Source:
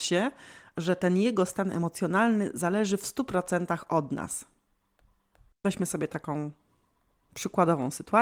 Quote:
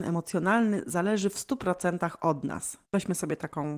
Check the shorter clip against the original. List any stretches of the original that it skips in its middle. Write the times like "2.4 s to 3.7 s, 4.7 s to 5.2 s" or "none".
4.5 s to 5.5 s